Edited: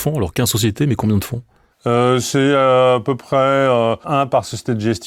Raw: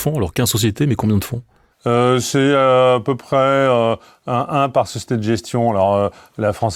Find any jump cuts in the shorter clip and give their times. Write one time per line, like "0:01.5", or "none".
0:04.0